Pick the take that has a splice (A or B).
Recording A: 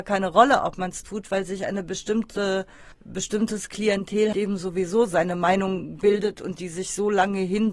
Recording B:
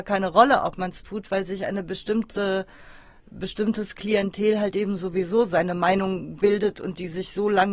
A